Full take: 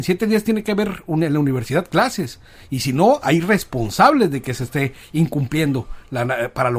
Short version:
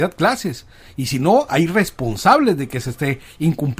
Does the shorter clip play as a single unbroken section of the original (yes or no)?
yes